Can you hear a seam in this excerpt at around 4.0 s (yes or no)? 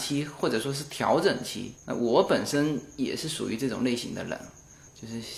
no